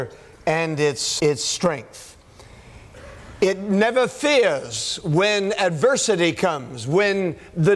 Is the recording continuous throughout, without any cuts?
no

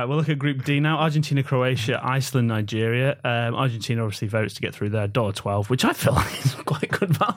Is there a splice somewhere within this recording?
no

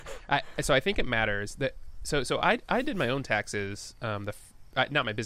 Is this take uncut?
yes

